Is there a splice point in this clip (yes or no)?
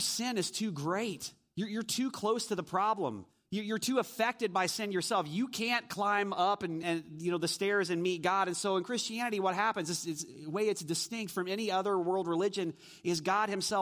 yes